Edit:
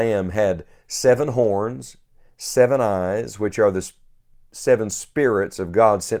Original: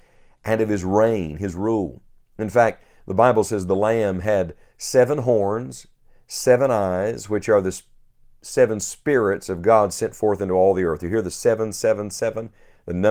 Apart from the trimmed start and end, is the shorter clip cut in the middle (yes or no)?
no